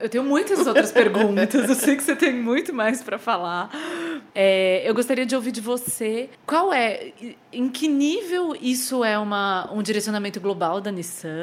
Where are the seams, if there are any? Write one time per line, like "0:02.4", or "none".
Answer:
0:04.3
0:06.3